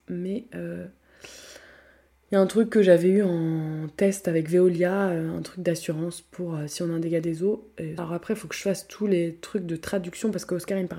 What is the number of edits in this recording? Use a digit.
1